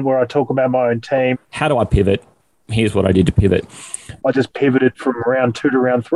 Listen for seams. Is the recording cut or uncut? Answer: cut